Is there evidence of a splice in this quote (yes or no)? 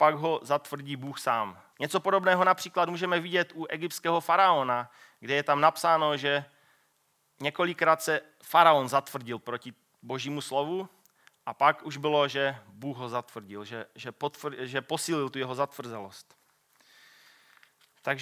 yes